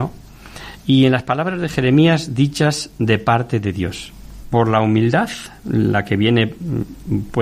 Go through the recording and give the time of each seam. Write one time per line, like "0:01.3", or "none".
0:04.4